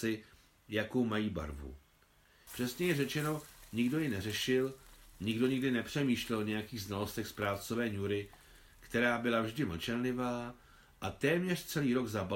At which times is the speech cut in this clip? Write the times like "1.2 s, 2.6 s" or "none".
2.5 s